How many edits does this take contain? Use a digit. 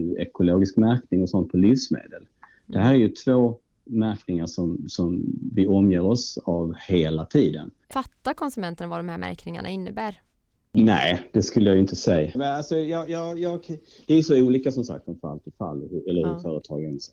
2